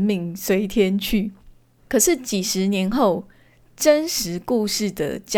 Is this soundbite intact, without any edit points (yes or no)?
yes